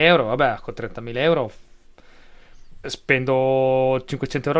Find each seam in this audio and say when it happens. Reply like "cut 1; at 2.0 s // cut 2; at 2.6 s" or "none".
cut 1; at 2.8 s